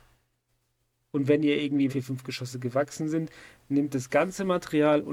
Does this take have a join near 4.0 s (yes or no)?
no